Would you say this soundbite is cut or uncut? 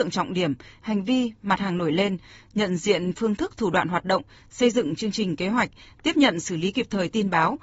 uncut